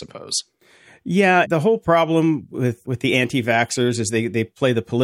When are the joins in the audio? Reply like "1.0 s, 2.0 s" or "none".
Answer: 1.4 s, 2.8 s